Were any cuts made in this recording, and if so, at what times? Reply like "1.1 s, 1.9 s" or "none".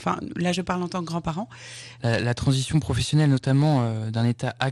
2.0 s

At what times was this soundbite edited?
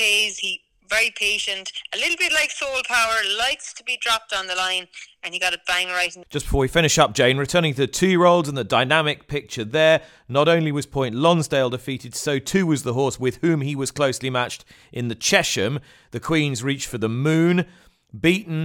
none

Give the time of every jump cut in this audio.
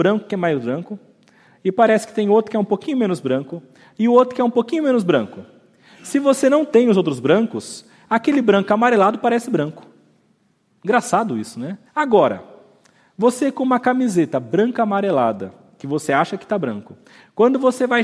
11.9 s

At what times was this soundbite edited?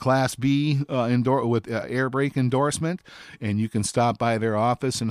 none

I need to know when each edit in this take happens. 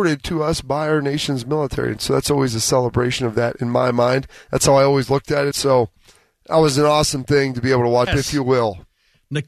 5.5 s, 8.1 s

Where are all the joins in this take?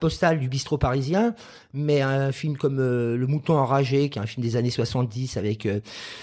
none

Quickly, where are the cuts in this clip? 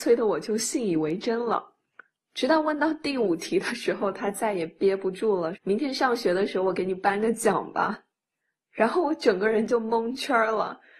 2.1 s, 5.5 s

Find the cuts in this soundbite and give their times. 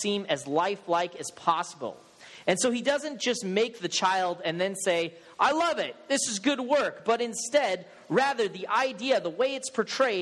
none

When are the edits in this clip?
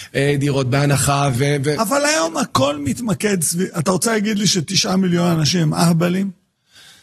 none

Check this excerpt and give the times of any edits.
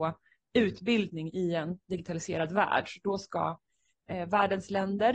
none

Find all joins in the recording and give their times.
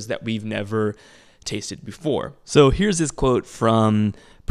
2.4 s

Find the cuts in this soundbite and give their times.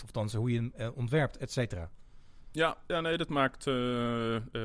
none

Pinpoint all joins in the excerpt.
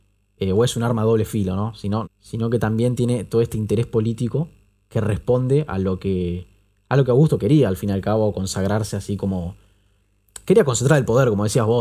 2.0 s

